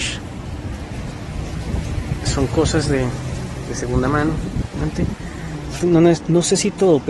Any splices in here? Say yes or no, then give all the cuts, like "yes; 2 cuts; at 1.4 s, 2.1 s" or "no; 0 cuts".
yes; 1 cut; at 5.8 s